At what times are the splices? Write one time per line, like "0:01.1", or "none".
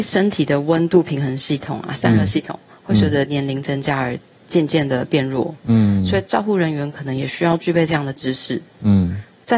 none